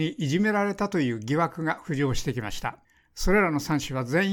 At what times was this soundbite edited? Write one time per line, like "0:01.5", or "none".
none